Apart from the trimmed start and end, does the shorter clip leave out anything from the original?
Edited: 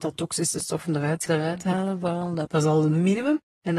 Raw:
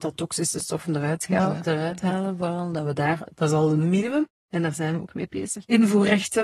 yes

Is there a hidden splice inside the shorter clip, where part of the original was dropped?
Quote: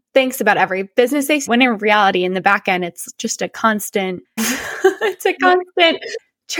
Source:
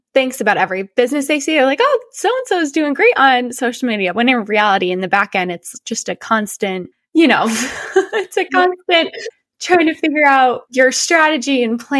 yes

